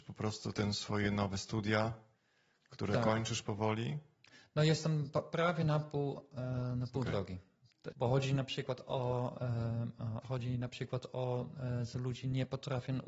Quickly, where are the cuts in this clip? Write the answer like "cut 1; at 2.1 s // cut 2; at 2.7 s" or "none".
cut 1; at 7.9 s // cut 2; at 10.2 s